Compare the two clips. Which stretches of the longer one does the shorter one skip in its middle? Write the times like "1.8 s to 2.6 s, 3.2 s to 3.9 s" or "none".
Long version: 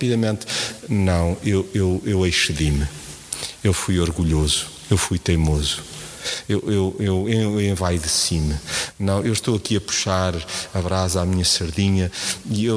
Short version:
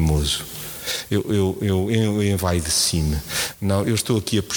none